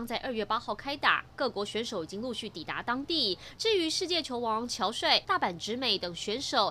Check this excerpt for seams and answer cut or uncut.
cut